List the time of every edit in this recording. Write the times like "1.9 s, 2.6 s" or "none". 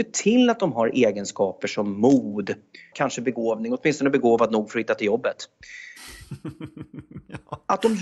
2.9 s